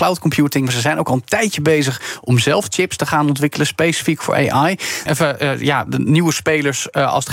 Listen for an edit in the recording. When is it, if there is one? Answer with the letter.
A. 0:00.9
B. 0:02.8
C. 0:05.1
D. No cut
C